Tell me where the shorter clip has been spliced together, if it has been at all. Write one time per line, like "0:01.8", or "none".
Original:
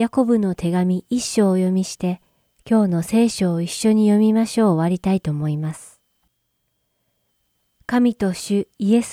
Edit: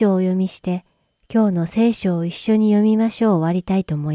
none